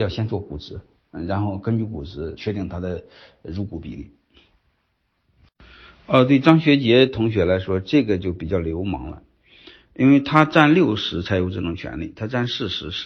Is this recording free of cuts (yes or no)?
no